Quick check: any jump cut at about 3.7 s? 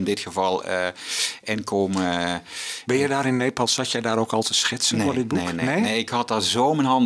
no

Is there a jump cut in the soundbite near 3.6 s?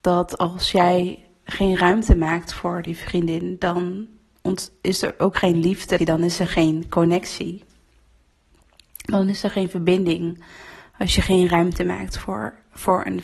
no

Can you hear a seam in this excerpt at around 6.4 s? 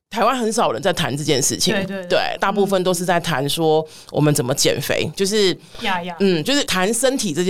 no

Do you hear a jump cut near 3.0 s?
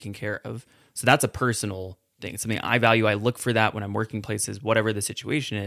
no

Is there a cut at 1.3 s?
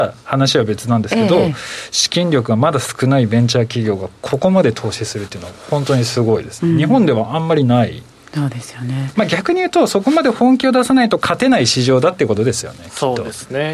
no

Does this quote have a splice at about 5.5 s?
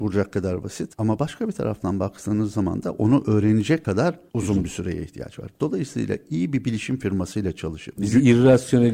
no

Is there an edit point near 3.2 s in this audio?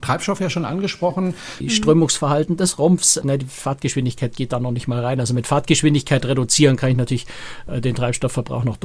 yes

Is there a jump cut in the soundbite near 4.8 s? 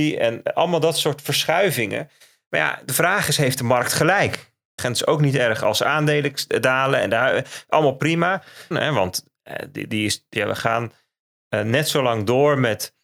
yes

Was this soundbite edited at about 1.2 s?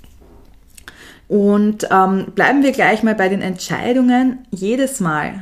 yes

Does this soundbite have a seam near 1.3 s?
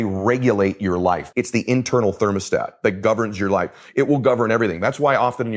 yes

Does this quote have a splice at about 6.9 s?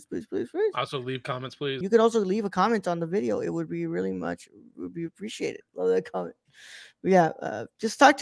no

